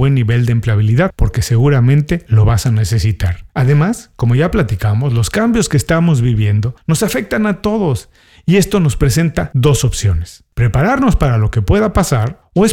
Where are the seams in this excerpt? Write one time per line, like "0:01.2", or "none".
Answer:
0:03.5